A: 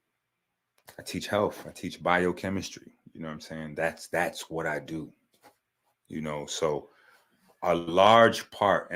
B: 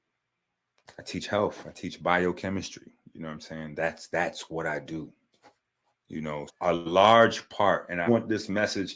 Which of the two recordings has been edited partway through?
B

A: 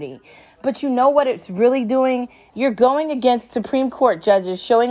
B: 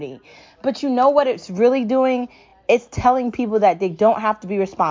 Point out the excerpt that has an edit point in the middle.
A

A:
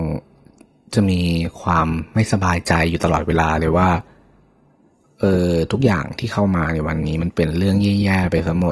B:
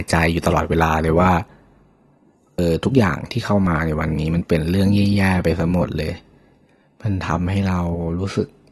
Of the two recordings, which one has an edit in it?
B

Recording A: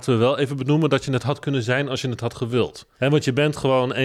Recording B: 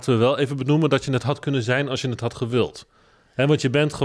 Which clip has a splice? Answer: A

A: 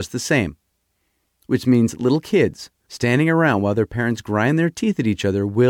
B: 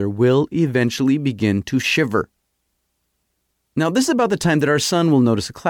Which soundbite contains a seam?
A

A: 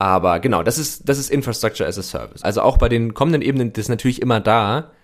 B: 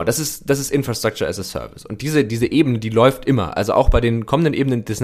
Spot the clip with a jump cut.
A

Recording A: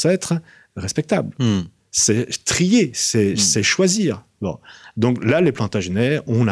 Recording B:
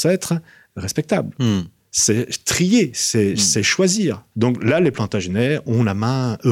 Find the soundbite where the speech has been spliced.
B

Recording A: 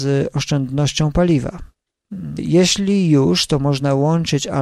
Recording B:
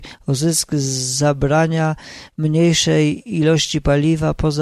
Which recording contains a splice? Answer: A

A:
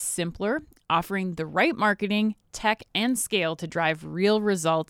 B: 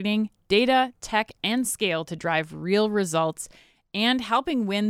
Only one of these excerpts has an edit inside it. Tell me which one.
A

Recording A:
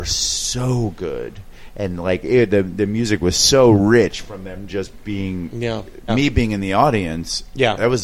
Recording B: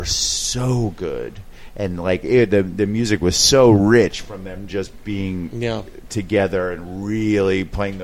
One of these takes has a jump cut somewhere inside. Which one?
A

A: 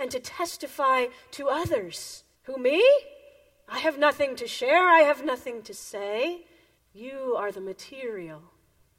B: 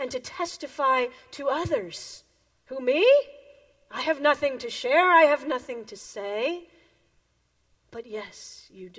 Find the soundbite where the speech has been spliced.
A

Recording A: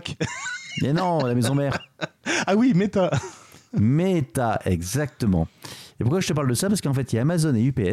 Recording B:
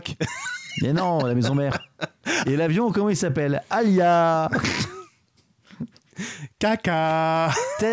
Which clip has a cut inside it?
B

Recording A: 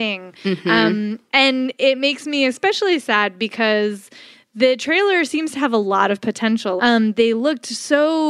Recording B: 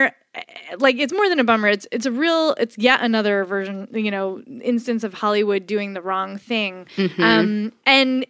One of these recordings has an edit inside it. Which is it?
A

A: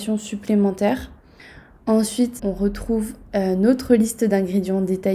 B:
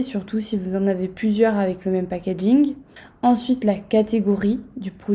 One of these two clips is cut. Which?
A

